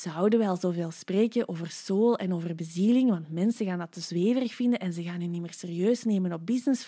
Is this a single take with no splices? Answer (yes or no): yes